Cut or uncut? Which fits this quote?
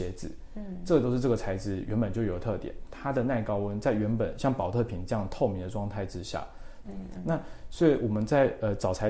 cut